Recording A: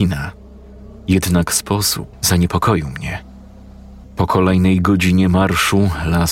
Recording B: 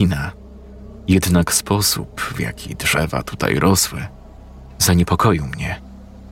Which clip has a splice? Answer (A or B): A